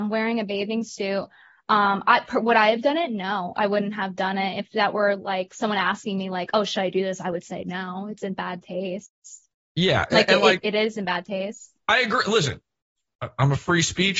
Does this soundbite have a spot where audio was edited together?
no; 0 cuts

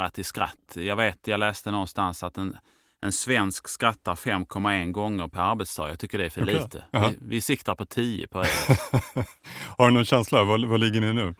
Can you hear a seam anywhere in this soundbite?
no; 0 cuts

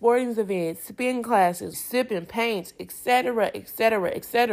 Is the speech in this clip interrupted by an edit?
yes; 1 cut; at 1.7 s

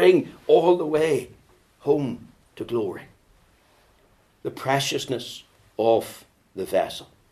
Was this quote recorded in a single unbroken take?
yes; 0 cuts

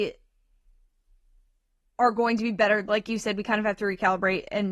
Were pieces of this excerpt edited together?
no; 0 cuts

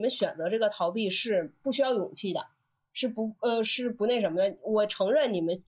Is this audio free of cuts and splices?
yes; 0 cuts

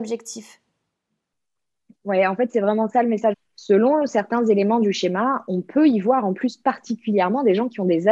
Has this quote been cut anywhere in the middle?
yes; 1 cut; at 3.3 s

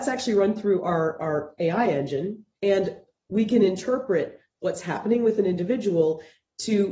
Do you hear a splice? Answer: yes; 1 cut; at 2.5 s

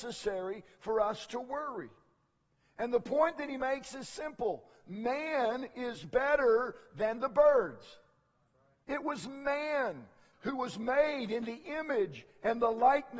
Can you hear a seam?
yes; 2 cuts; at 8.8 s, 10.3 s

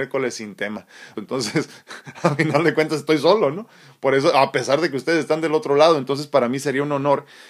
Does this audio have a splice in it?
yes; 1 cut; at 1.1 s

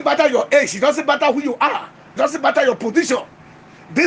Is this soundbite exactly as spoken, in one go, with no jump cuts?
no; 1 cut; at 2.2 s

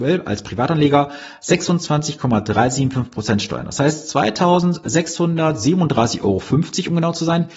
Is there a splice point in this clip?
no; 0 cuts

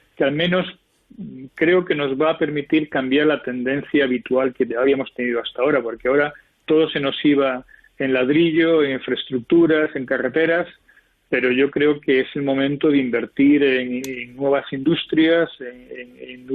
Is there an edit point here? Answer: no; 0 cuts

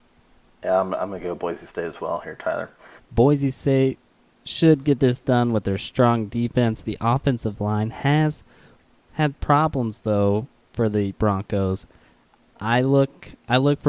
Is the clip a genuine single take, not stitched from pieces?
no; 1 cut; at 3.0 s

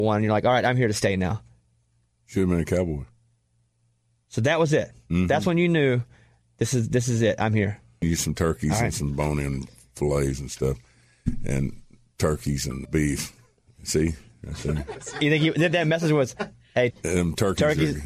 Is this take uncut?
no; 3 cuts; at 8.0 s, 12.9 s, 16.9 s

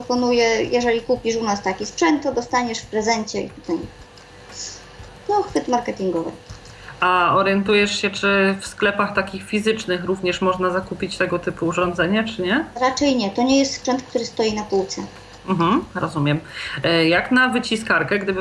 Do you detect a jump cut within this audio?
no; 0 cuts

